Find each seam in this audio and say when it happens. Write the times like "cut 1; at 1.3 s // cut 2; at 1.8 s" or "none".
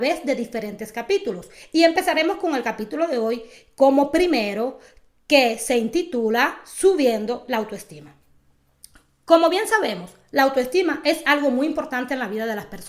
none